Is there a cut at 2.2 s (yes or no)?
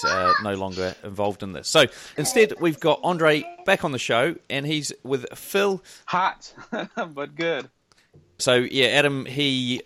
yes